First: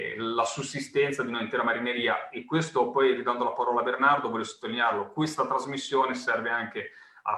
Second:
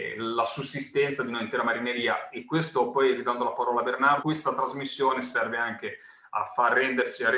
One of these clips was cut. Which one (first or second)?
second